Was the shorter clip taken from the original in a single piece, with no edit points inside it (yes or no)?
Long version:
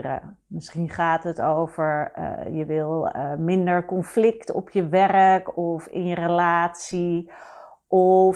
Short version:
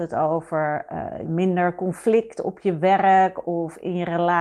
no